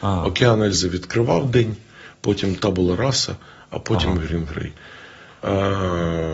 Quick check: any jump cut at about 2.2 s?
no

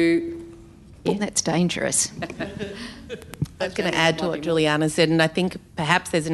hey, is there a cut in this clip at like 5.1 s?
no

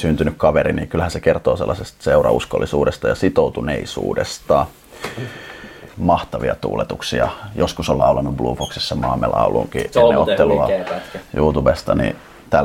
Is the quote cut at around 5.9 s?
yes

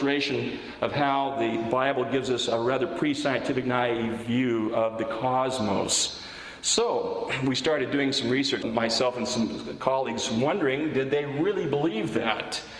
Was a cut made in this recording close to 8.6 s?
yes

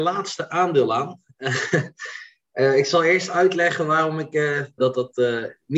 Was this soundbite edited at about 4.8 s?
yes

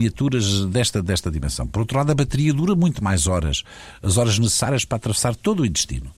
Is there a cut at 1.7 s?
no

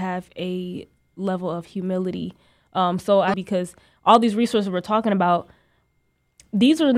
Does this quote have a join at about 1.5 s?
no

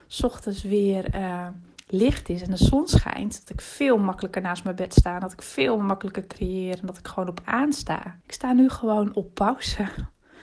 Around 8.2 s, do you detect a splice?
yes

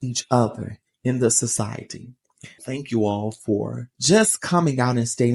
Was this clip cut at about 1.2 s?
no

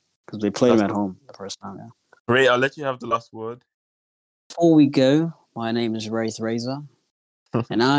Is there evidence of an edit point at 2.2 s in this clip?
yes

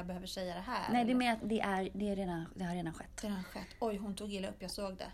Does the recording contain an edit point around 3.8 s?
no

